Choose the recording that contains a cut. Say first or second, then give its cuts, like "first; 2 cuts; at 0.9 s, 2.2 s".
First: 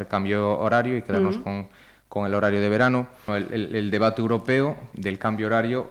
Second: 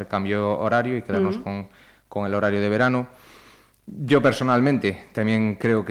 first; 2 cuts; at 3.3 s, 4.9 s